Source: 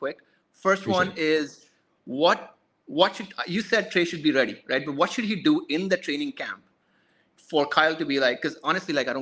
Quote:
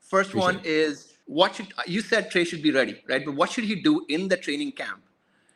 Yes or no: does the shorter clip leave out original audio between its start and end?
yes